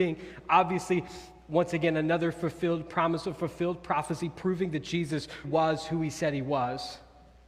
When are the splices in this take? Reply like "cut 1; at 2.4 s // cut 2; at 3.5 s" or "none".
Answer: cut 1; at 5.4 s